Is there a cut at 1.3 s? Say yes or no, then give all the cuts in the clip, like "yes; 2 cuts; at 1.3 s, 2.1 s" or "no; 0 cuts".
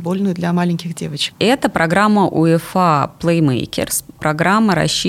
yes; 1 cut; at 1.3 s